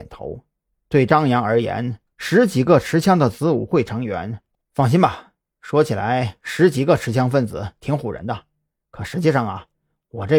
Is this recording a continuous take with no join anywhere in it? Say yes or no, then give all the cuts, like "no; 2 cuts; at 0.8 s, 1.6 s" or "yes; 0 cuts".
no; 1 cut; at 4.6 s